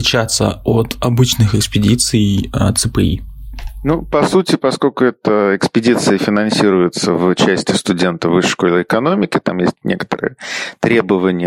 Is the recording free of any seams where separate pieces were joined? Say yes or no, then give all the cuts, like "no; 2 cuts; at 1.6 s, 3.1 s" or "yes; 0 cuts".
yes; 0 cuts